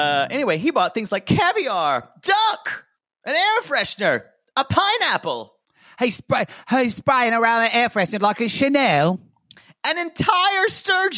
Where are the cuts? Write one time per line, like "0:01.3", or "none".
none